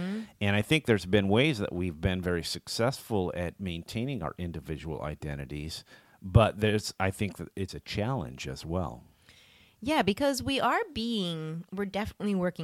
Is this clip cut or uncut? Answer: cut